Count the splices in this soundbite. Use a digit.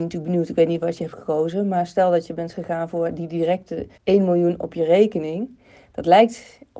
1